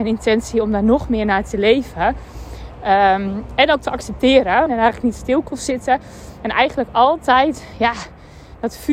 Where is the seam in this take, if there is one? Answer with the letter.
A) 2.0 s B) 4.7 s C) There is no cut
B